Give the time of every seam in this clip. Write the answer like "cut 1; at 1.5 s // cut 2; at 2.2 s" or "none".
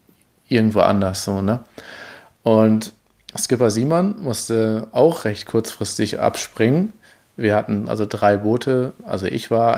none